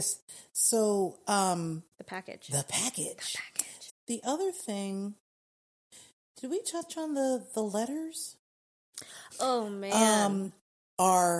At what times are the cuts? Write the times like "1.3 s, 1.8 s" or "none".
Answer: 1.9 s, 3.9 s, 9.3 s